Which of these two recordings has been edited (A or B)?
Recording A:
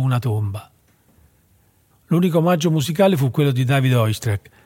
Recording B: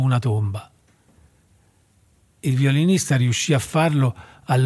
A